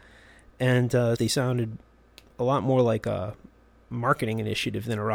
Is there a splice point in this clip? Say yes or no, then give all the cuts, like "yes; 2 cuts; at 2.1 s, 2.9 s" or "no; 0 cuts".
yes; 1 cut; at 1.2 s